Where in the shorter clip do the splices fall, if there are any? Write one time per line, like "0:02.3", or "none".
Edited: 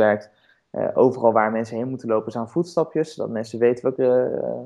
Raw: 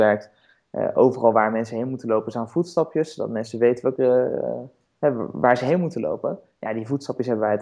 none